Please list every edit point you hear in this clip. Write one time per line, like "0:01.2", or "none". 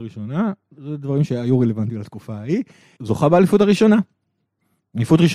0:03.0